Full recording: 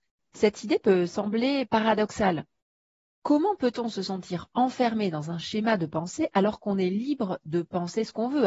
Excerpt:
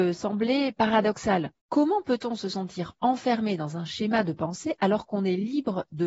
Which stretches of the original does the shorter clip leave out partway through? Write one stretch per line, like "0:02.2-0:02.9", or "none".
0:02.5-0:03.1